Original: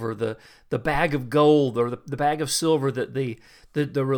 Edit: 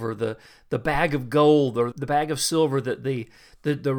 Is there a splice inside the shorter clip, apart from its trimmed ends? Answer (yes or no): yes